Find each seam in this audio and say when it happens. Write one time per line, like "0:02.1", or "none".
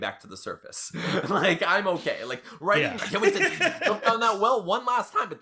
0:03.0